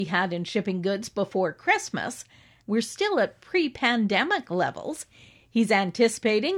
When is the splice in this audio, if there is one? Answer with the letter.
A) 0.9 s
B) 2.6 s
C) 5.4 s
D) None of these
B